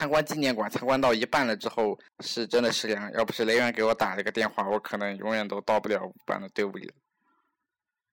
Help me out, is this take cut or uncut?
cut